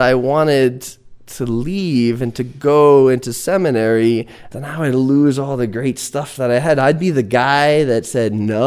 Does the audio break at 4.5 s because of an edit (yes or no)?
yes